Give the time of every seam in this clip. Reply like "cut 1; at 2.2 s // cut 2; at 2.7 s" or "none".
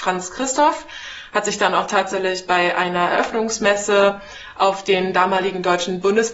none